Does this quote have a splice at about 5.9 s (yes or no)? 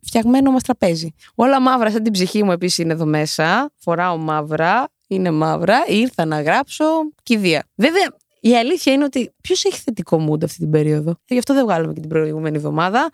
no